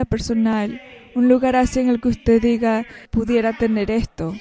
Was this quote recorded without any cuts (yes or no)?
no